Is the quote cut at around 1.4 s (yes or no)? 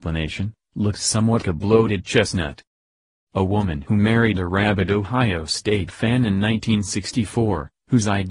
yes